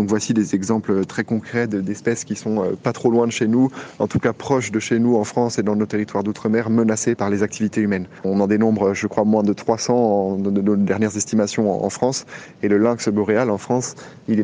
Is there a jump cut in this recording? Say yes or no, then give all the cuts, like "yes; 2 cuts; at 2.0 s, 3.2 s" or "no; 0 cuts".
yes; 1 cut; at 8.2 s